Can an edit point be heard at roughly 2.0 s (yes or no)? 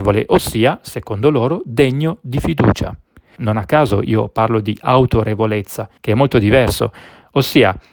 no